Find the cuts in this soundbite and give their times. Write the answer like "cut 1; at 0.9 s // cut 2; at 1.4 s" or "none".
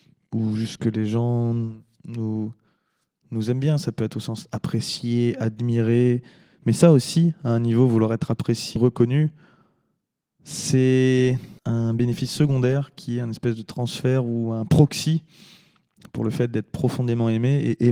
cut 1; at 8.8 s // cut 2; at 11.6 s